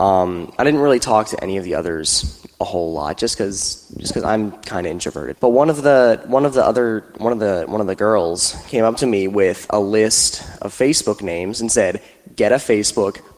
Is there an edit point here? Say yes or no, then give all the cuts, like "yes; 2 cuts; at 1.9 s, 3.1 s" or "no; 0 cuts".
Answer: yes; 1 cut; at 5.3 s